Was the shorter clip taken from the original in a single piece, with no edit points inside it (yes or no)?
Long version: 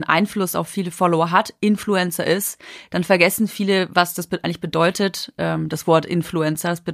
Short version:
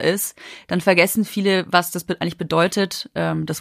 yes